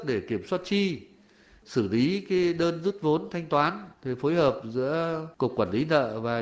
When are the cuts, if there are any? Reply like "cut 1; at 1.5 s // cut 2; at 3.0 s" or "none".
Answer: none